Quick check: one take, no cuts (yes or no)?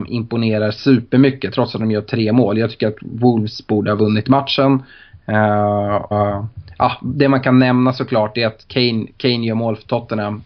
no